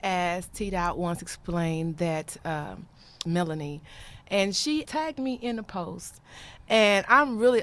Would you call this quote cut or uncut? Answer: cut